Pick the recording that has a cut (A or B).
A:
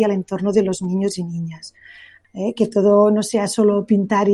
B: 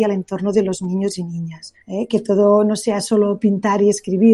B